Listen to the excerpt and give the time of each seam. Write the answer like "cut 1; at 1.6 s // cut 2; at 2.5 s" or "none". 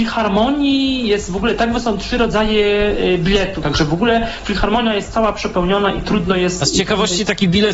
cut 1; at 3.6 s